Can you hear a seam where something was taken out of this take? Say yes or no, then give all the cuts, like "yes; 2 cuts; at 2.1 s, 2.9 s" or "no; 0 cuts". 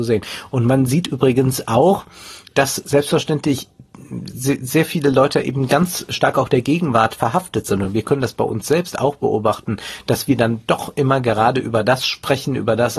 no; 0 cuts